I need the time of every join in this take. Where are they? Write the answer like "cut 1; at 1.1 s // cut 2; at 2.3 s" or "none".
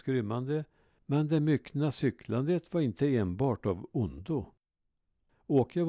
cut 1; at 1.0 s